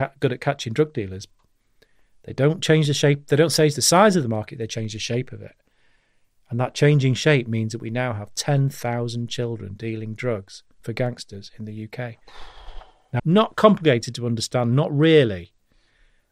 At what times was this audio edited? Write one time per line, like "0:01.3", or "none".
0:13.2